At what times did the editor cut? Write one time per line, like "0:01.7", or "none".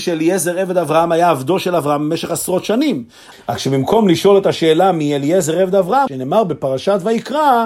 0:03.3
0:06.1